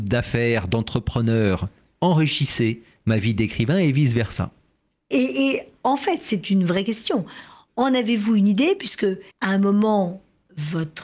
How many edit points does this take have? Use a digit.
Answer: 2